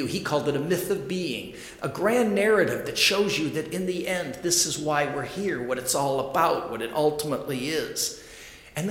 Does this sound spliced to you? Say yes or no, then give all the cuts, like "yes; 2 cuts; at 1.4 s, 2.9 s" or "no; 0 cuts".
no; 0 cuts